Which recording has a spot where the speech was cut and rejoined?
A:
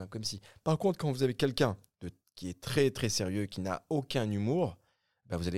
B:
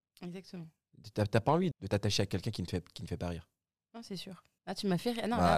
B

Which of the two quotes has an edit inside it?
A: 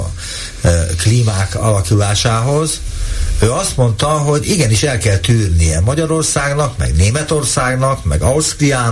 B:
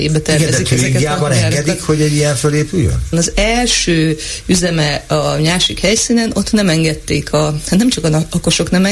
B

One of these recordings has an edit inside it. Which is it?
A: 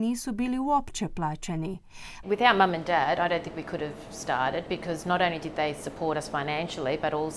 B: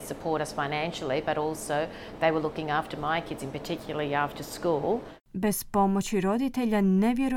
A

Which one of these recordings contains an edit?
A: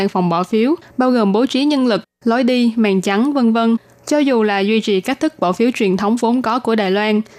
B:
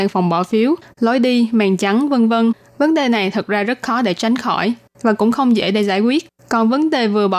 B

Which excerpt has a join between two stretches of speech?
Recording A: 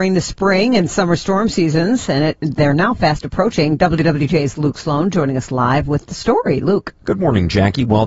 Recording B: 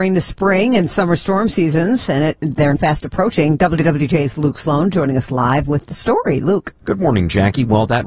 B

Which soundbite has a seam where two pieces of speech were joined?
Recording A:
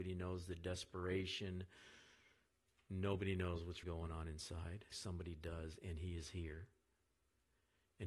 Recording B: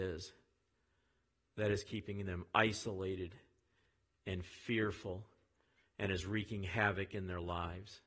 A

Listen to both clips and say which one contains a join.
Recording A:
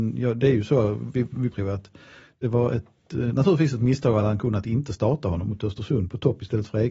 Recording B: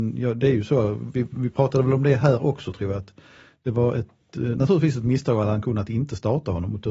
A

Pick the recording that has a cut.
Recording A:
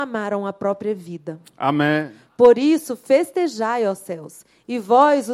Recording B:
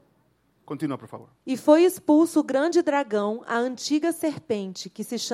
B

